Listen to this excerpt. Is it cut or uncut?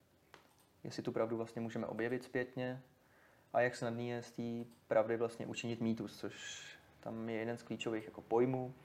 uncut